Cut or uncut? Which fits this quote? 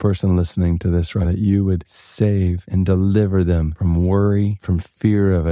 cut